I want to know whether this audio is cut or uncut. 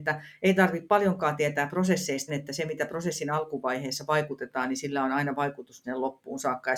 cut